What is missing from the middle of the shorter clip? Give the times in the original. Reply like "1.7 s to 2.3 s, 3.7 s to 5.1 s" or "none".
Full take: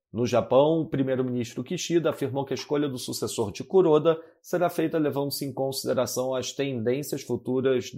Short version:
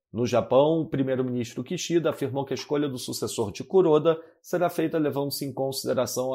none